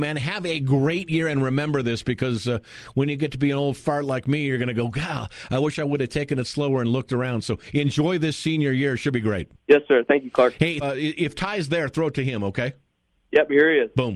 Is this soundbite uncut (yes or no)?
no